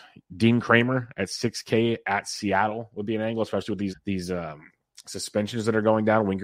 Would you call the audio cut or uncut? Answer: cut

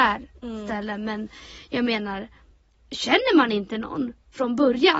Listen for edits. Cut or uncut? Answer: uncut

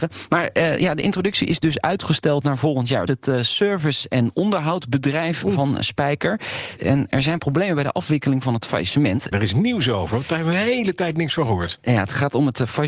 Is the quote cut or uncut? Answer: cut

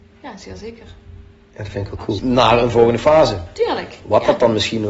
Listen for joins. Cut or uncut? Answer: cut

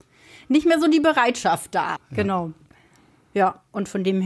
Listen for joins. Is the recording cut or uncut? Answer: cut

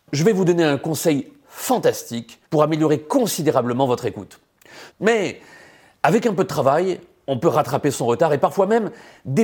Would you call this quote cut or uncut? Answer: cut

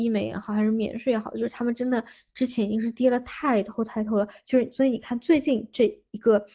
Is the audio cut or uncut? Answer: uncut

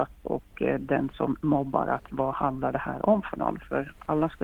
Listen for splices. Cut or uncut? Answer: uncut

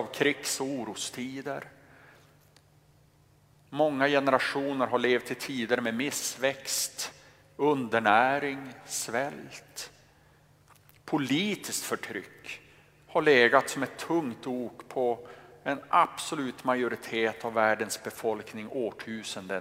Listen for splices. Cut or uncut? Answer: uncut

